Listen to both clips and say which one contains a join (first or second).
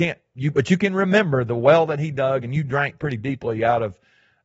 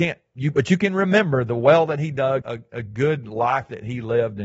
second